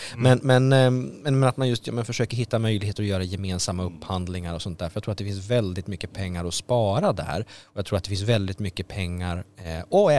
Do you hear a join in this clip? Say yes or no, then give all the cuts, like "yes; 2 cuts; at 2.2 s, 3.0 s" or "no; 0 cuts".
no; 0 cuts